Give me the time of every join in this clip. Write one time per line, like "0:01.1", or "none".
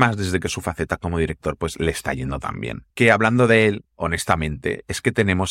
none

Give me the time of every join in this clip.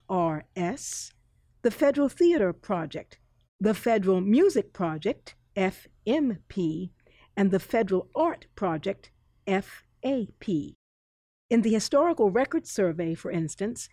0:03.5
0:05.4

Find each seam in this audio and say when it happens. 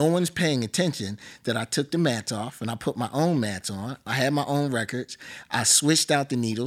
none

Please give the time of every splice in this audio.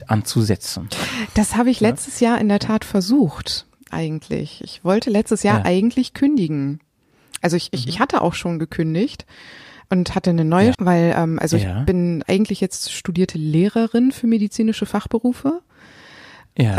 0:10.7
0:12.2

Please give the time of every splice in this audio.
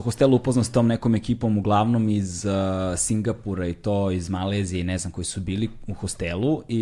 none

